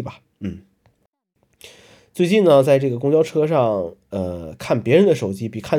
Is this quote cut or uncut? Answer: uncut